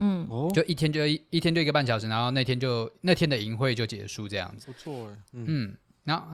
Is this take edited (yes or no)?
yes